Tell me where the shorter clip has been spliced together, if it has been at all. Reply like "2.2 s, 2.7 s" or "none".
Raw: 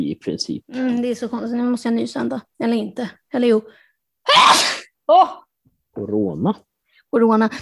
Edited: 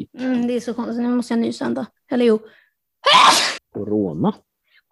2.0 s, 3.6 s

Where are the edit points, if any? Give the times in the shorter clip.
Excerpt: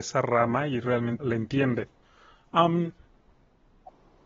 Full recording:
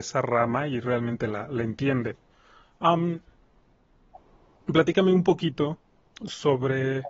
1.2 s

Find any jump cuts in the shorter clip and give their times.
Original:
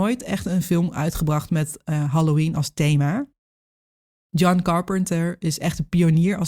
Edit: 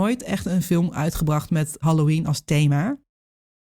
1.8 s

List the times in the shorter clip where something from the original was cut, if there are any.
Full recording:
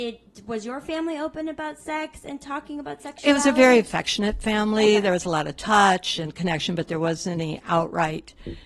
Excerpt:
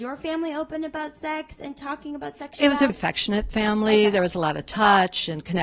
2.9 s

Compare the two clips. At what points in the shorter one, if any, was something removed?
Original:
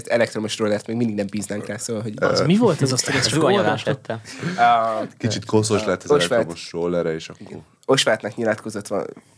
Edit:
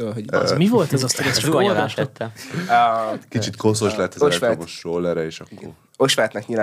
none

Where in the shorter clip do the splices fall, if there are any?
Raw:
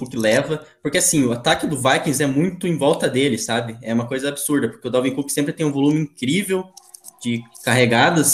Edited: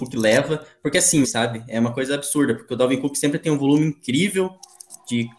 1.2 s

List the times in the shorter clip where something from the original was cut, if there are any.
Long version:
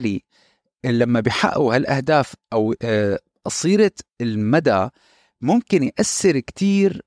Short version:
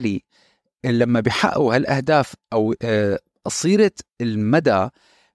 none

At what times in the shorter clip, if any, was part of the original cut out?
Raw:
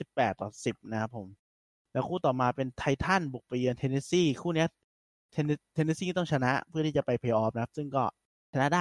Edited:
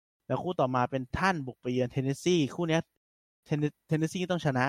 1.1 s

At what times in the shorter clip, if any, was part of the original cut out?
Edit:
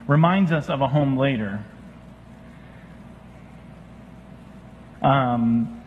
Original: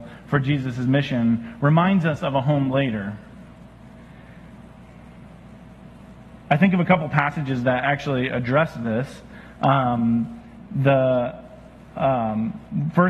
4.9 s

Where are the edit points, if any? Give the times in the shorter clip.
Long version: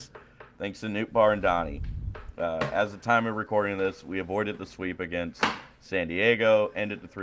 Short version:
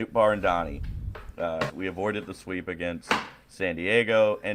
1.7 s

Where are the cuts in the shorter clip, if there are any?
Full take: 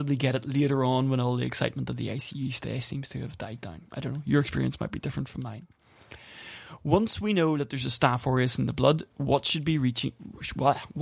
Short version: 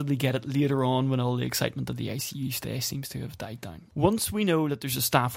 3.9 s

